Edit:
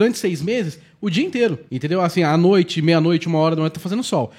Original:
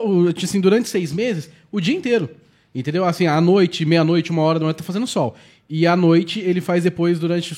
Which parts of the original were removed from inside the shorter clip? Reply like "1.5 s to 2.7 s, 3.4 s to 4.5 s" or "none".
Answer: 2.4 s to 2.7 s